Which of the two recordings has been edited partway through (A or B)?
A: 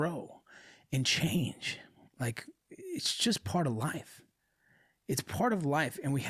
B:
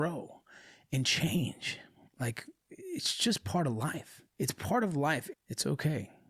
B